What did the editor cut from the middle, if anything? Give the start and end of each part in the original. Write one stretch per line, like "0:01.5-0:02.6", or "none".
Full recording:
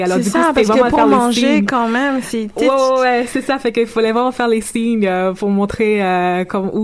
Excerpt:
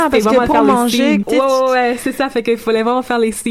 0:01.7-0:02.5